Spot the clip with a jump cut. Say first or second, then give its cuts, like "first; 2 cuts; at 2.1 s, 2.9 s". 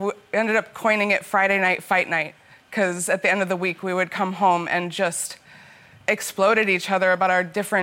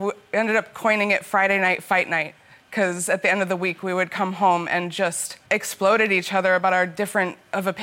second; 1 cut; at 5.5 s